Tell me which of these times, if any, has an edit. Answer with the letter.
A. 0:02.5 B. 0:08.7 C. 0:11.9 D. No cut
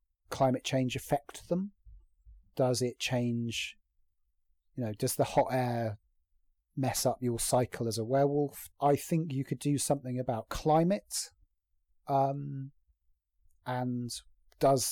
B